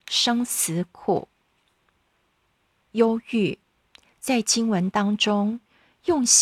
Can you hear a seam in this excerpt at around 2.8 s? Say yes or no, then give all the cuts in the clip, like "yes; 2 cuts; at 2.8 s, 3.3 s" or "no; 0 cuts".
yes; 1 cut; at 2.8 s